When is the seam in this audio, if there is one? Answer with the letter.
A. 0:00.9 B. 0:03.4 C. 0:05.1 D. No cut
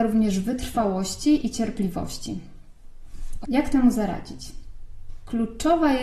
B